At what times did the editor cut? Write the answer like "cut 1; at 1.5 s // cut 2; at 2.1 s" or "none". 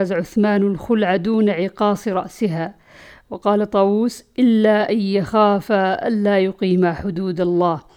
none